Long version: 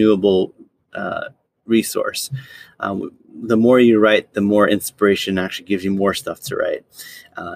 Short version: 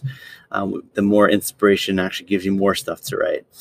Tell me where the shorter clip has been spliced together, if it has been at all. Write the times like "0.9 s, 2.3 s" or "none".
0.9 s